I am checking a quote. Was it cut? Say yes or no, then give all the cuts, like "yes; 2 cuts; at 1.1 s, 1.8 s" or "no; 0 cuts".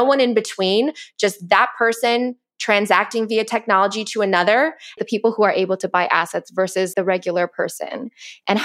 yes; 2 cuts; at 5.0 s, 6.9 s